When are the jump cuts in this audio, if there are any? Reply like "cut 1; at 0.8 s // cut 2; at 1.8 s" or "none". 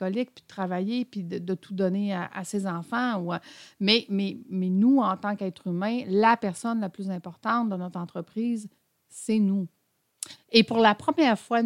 cut 1; at 10.4 s